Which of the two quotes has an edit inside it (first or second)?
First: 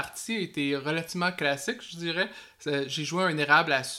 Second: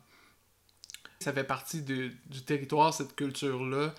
second